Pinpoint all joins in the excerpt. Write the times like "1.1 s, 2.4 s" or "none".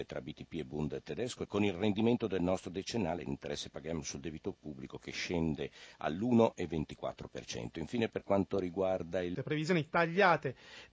1.5 s, 9.3 s